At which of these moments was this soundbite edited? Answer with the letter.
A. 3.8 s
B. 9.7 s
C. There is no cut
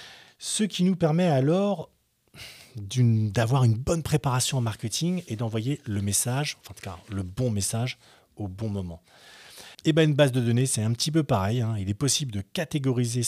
B